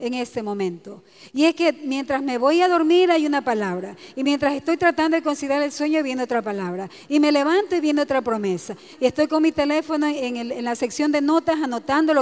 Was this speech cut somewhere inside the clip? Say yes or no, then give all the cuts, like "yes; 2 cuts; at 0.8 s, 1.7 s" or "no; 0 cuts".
yes; 1 cut; at 8.9 s